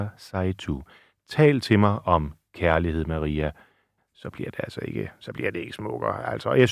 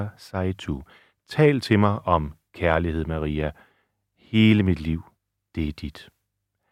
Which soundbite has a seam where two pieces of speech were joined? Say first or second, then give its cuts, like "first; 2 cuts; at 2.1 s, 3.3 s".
first; 1 cut; at 4.0 s